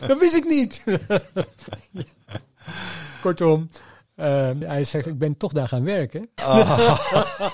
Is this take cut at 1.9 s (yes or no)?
no